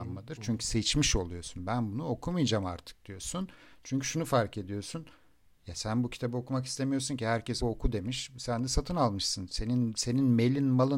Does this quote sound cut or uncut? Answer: cut